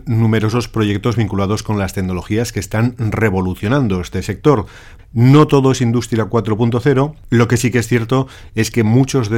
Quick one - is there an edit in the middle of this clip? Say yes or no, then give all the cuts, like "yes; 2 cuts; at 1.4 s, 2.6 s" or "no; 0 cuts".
yes; 1 cut; at 5.0 s